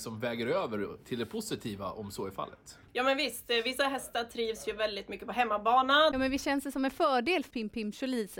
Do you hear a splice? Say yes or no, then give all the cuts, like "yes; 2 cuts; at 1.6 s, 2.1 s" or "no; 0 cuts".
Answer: yes; 3 cuts; at 2.9 s, 6.1 s, 7.5 s